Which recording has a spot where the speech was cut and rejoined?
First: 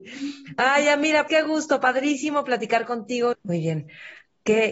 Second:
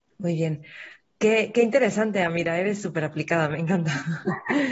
first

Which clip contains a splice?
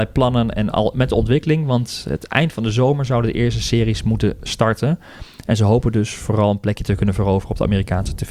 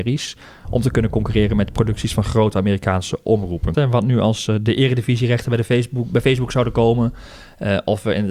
second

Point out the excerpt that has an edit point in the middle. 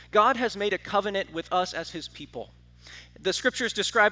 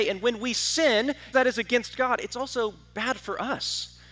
second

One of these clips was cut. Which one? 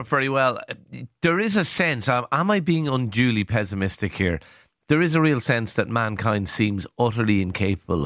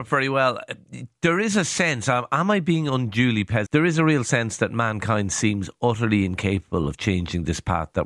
second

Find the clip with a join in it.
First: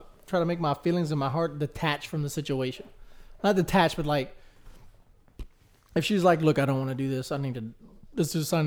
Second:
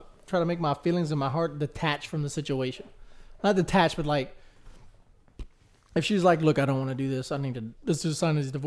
second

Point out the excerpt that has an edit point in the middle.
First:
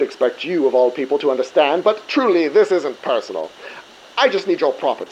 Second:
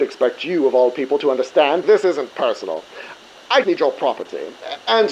second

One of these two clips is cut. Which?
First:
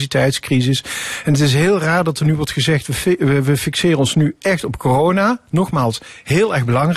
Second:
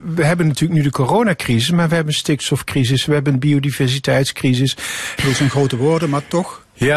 second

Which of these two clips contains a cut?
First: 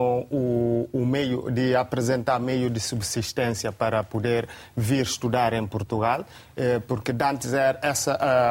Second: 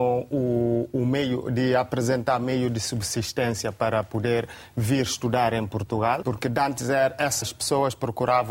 second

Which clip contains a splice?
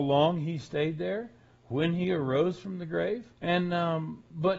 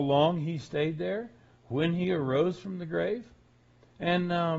first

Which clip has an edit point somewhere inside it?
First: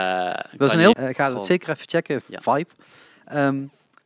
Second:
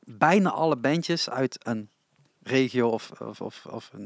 first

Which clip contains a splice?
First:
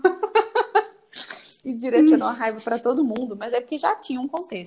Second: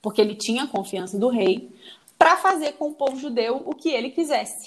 first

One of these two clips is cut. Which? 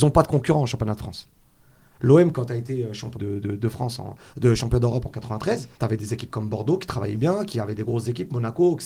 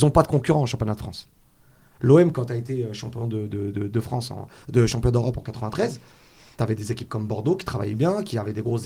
first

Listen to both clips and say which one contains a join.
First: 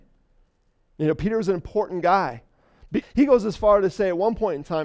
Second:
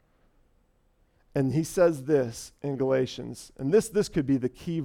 first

